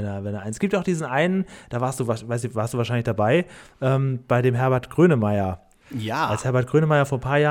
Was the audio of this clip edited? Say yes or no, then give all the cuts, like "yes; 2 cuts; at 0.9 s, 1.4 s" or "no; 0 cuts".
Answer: yes; 1 cut; at 5.8 s